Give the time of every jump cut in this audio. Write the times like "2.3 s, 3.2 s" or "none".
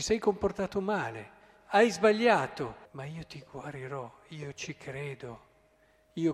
2.8 s